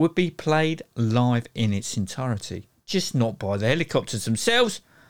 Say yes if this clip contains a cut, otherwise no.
no